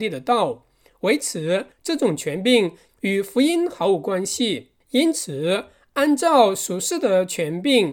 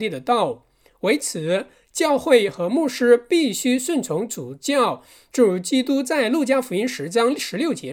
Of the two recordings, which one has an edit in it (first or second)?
first